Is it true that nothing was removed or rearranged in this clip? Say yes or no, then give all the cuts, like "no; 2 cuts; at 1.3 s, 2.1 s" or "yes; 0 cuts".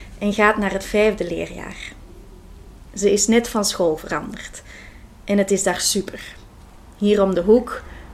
yes; 0 cuts